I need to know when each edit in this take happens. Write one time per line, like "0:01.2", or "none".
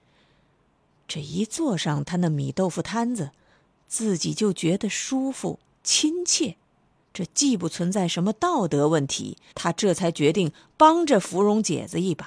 0:07.0
0:09.5